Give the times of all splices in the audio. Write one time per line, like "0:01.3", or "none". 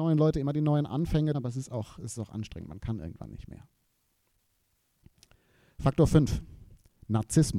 0:01.3